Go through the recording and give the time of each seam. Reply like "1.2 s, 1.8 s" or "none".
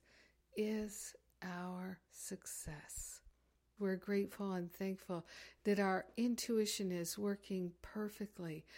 2.0 s, 3.8 s